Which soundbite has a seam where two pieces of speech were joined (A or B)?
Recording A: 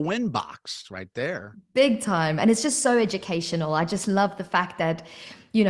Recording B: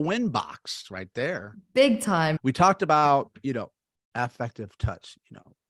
B